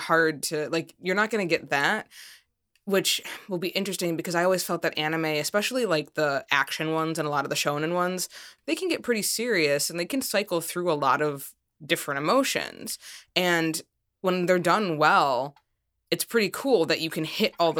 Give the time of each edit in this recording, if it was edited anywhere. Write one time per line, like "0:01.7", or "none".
0:08.6